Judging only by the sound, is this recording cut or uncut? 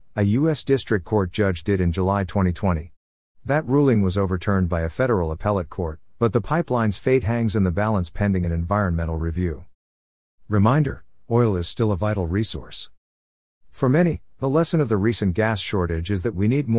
uncut